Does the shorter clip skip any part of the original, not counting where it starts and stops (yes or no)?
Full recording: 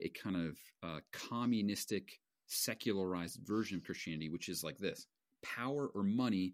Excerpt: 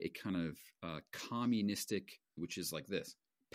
yes